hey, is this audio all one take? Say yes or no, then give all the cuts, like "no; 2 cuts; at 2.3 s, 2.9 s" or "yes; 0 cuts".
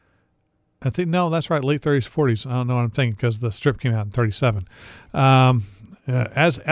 yes; 0 cuts